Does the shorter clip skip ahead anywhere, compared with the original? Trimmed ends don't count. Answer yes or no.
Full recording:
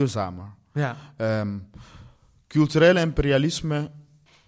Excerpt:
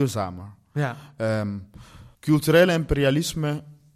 yes